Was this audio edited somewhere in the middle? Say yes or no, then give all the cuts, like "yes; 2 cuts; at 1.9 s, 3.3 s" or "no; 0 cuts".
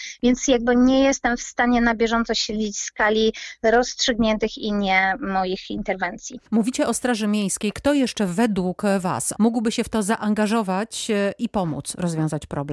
yes; 2 cuts; at 6.5 s, 9.3 s